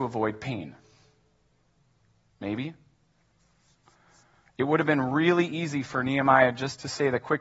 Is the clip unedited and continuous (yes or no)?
yes